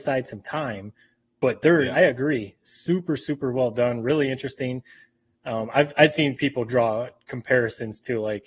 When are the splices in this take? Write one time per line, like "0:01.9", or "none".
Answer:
0:01.9